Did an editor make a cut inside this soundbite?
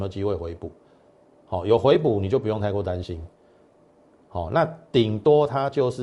no; 0 cuts

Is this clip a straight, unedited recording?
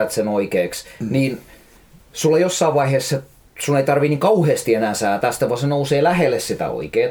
yes; 0 cuts

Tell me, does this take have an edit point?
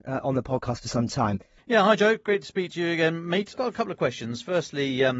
yes; 2 cuts; at 1.6 s, 3.5 s

